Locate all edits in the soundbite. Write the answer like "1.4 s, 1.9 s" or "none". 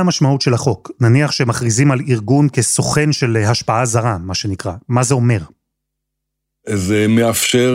none